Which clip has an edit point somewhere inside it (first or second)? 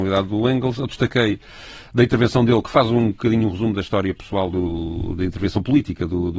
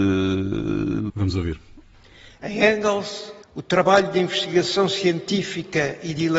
second